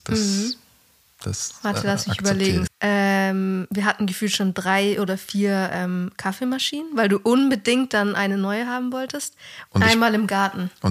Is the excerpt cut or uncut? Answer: cut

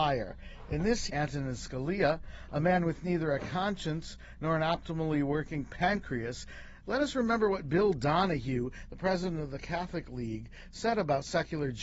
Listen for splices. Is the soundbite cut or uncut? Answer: cut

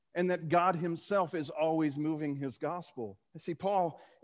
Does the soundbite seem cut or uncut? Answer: cut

